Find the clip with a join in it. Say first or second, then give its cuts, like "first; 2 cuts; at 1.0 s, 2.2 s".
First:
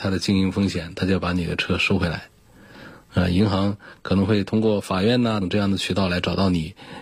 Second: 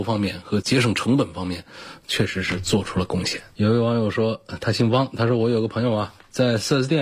first; 1 cut; at 5.4 s